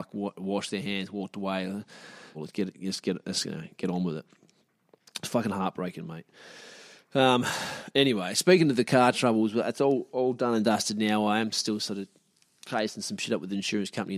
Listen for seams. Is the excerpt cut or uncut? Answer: cut